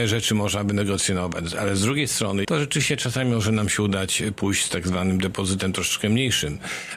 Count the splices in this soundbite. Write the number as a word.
one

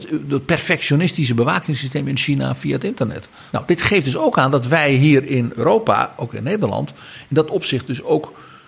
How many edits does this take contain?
one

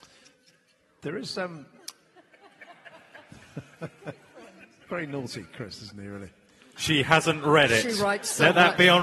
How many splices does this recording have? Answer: one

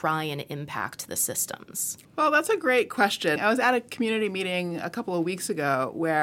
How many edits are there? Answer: two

